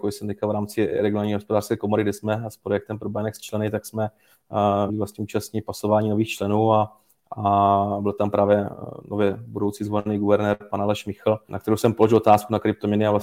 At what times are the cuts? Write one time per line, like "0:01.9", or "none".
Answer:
0:04.9
0:11.5